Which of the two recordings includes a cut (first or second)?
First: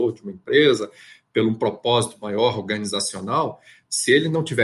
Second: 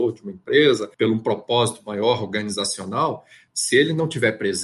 second